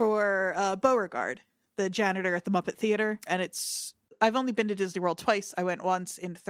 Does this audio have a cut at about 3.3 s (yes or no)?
yes